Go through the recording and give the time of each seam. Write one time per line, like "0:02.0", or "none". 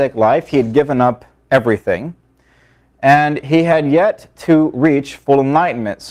none